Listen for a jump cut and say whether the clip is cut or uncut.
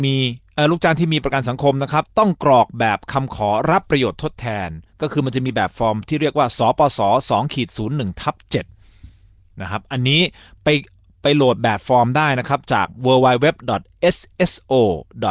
uncut